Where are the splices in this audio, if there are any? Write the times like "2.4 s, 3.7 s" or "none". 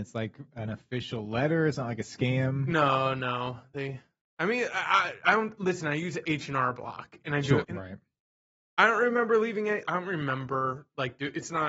7.6 s, 9.8 s